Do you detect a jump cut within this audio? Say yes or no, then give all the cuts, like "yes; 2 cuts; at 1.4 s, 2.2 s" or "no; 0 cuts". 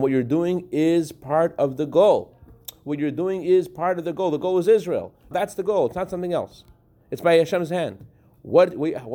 yes; 1 cut; at 5.3 s